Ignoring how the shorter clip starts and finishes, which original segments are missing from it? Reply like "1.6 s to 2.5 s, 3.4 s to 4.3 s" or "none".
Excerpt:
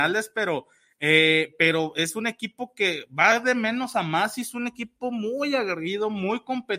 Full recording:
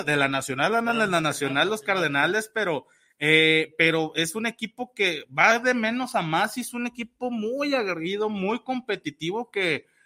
none